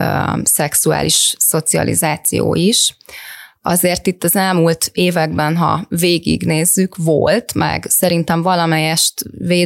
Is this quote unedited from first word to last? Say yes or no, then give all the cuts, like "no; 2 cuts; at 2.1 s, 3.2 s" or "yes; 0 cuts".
yes; 0 cuts